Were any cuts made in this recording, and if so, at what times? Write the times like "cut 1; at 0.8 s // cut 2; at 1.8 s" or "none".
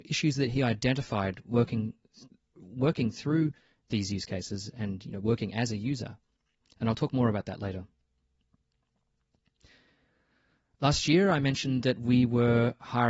none